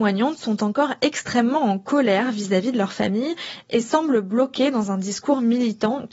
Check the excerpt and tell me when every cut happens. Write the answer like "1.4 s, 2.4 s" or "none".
none